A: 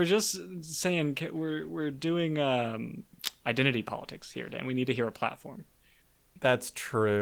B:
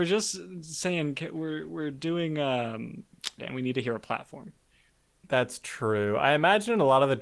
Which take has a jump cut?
B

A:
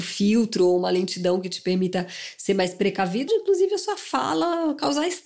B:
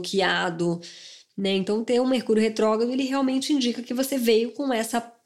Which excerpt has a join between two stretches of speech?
A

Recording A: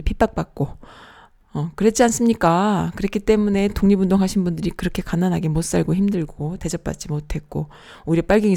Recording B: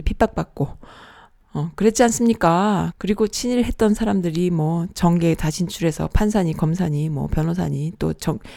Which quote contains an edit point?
B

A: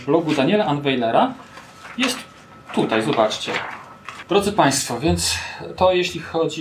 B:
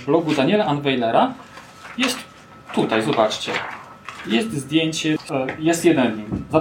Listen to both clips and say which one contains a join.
A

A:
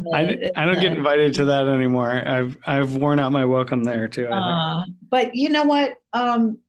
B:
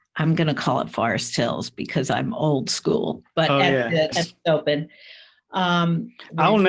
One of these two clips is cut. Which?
B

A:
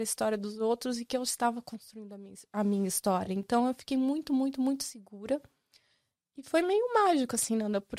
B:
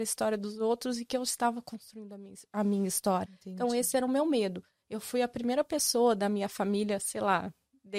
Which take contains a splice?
B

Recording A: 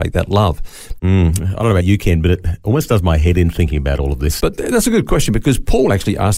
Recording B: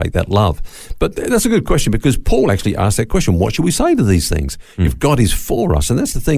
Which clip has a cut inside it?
A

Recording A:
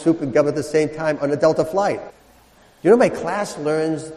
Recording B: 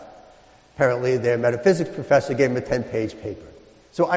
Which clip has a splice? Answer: A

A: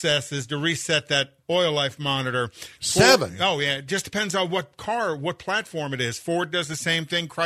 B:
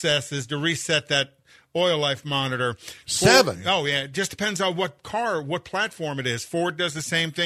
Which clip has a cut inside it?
A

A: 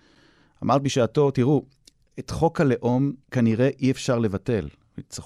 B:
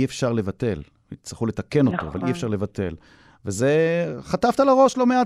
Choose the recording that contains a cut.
A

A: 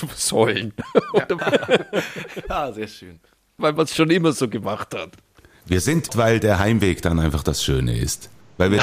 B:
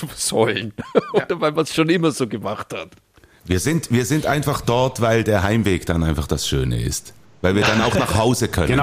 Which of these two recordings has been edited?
A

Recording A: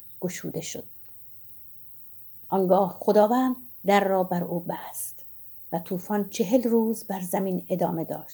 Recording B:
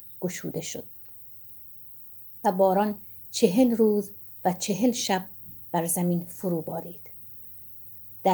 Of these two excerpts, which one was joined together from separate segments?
A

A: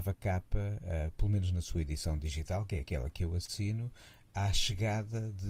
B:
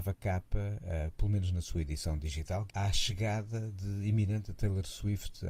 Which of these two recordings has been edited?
B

